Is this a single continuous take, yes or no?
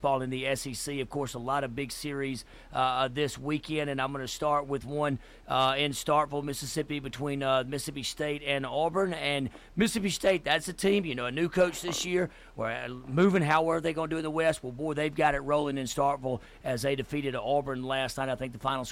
yes